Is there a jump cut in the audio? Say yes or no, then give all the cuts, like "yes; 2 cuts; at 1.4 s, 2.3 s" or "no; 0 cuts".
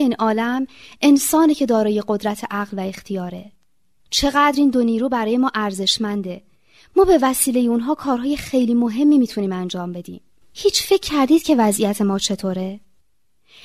yes; 1 cut; at 10.4 s